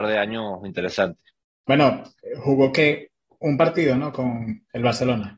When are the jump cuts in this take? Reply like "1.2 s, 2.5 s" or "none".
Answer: 1.6 s